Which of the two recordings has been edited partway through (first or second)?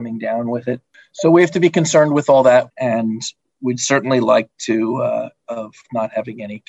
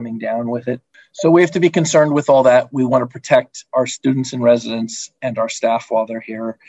first